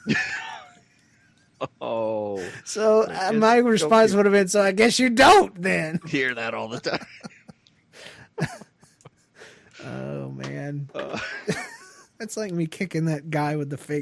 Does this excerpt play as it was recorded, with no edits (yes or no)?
yes